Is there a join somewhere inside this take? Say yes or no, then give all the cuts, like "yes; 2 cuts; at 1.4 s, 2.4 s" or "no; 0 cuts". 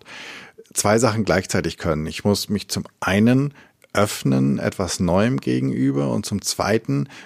no; 0 cuts